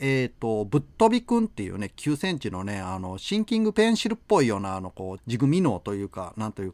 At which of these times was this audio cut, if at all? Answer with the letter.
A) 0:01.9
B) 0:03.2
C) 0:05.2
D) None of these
C